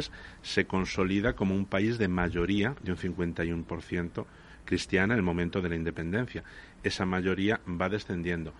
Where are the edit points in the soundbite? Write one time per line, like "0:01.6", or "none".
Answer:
none